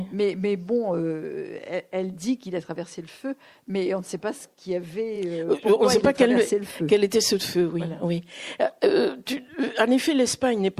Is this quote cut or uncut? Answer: uncut